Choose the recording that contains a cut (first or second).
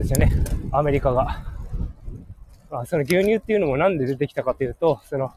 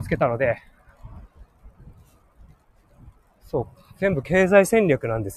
first